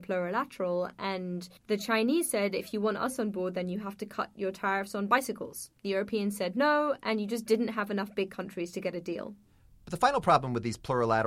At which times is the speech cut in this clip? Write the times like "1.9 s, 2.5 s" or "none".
1.6 s